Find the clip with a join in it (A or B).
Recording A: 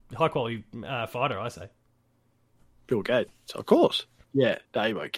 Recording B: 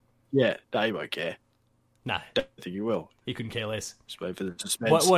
A